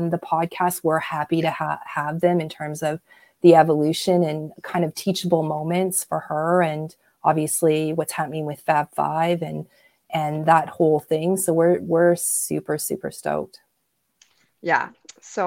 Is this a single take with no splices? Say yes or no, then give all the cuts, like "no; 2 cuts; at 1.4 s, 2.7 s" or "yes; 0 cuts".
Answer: yes; 0 cuts